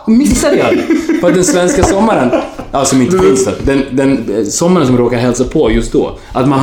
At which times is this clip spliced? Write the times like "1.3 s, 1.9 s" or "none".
none